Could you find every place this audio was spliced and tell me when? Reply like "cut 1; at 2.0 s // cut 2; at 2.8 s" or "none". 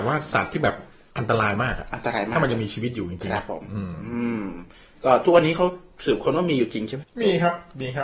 cut 1; at 7.0 s

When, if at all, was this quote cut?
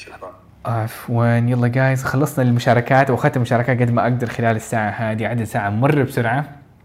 cut 1; at 2.0 s

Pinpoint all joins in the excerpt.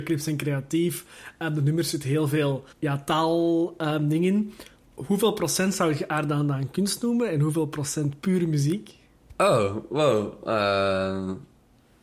cut 1; at 2.7 s

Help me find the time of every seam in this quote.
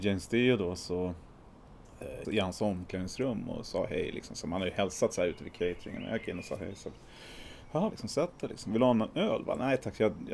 cut 1; at 2.2 s // cut 2; at 7.9 s

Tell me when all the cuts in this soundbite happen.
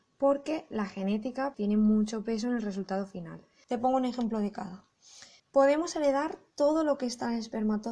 cut 1; at 1.5 s // cut 2; at 3.6 s // cut 3; at 5.4 s

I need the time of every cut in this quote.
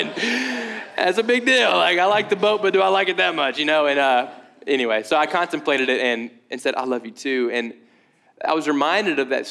none

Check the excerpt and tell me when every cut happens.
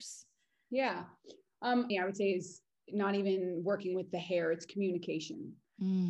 cut 1; at 1.9 s

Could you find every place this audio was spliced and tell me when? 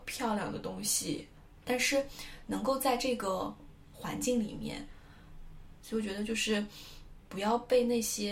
cut 1; at 1.6 s // cut 2; at 5.8 s // cut 3; at 7.2 s

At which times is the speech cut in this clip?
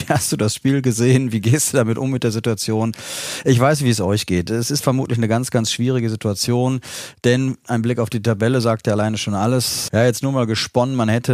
cut 1; at 9.9 s

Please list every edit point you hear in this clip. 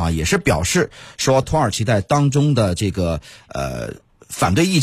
cut 1; at 1.4 s

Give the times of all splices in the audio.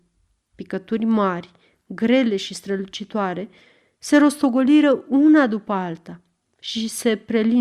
none

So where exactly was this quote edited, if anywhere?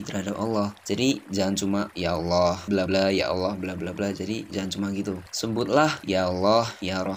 cut 1; at 2.9 s

